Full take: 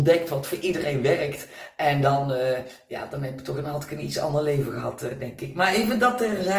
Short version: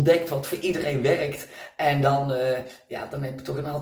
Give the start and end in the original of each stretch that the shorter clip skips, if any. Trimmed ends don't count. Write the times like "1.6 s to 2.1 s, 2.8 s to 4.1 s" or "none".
none